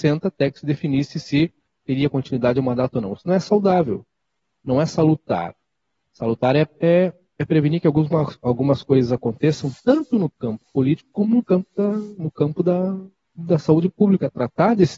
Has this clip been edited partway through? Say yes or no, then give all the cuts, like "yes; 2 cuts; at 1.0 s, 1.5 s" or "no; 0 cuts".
no; 0 cuts